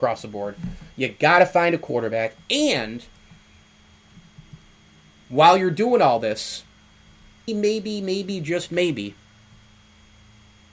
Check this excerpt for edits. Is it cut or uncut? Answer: cut